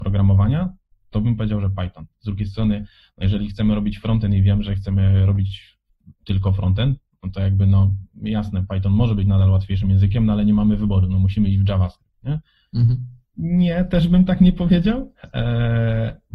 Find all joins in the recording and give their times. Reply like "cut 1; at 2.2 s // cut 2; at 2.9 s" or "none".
cut 1; at 13.3 s